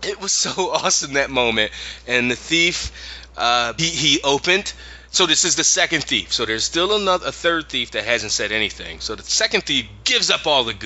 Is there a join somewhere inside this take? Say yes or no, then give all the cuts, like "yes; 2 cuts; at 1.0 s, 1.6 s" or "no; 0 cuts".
yes; 1 cut; at 3.8 s